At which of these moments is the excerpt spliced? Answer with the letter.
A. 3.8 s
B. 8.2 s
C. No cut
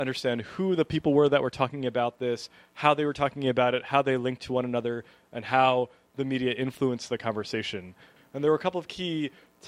B